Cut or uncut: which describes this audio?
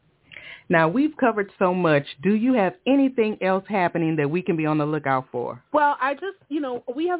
cut